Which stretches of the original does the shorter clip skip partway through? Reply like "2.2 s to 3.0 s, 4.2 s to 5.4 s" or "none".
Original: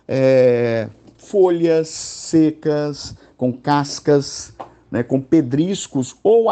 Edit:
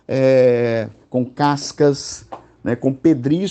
1.0 s to 3.3 s